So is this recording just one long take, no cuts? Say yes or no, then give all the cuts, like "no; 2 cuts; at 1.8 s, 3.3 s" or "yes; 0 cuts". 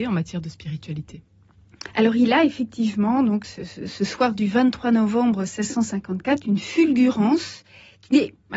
yes; 0 cuts